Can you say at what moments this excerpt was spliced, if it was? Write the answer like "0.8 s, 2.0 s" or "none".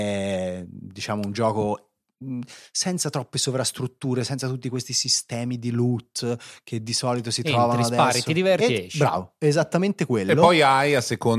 none

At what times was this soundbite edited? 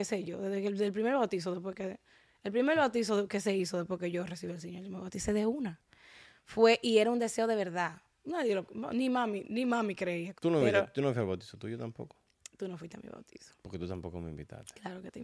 10.4 s

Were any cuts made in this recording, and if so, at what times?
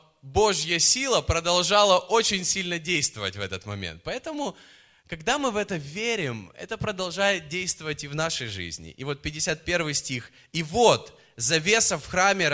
none

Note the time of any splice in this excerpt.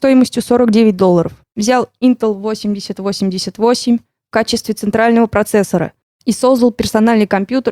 1.4 s

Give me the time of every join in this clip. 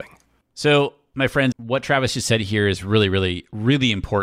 1.5 s

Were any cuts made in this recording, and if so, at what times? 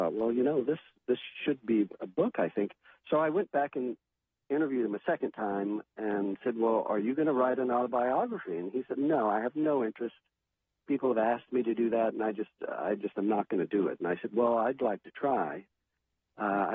none

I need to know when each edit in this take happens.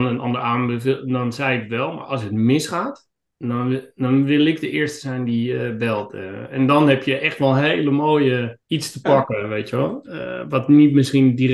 8.6 s

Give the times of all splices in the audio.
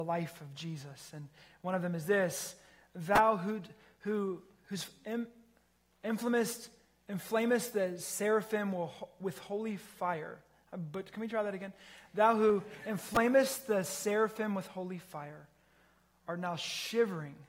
none

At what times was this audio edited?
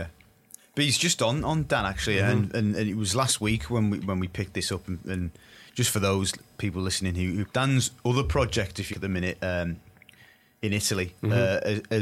7.5 s, 8.9 s

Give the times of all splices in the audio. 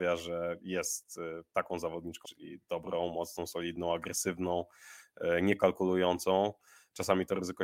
2.2 s

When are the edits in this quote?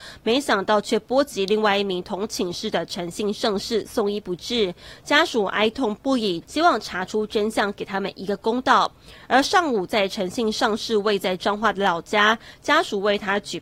6.4 s

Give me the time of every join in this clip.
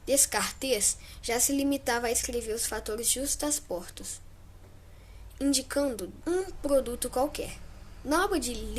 6.2 s

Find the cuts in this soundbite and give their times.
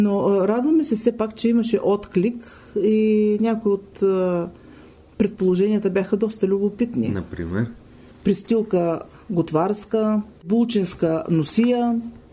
none

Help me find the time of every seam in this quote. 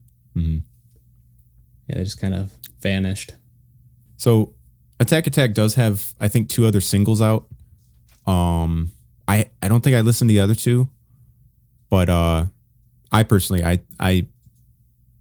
4.1 s

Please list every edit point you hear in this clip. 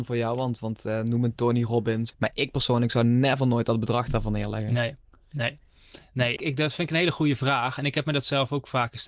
2.1 s, 6.4 s

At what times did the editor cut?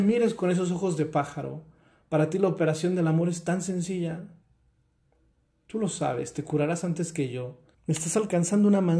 7.7 s

